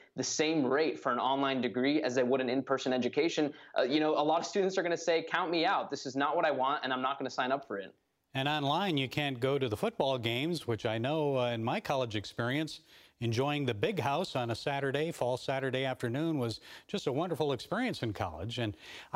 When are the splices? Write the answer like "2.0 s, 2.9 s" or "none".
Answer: none